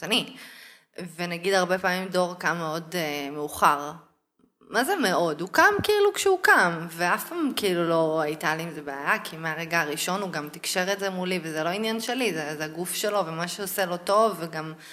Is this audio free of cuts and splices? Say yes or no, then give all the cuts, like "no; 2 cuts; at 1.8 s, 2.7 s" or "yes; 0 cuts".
yes; 0 cuts